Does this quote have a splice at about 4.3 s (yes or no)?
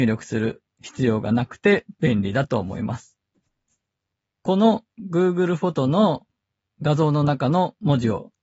no